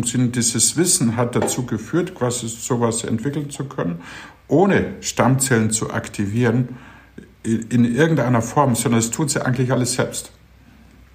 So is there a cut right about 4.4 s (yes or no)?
no